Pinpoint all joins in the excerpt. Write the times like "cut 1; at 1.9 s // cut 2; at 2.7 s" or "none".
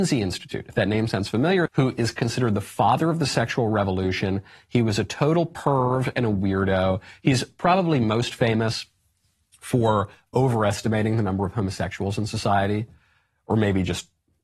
cut 1; at 1.7 s